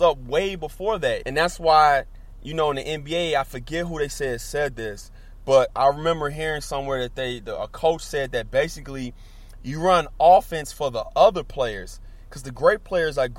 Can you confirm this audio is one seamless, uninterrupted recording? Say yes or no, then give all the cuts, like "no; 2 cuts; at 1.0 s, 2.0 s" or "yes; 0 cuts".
no; 1 cut; at 1.2 s